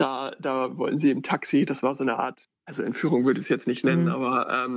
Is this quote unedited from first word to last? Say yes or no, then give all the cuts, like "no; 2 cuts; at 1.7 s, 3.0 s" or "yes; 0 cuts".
no; 1 cut; at 2.6 s